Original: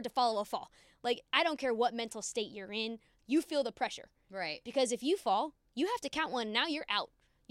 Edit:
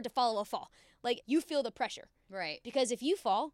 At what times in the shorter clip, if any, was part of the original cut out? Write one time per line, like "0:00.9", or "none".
0:01.2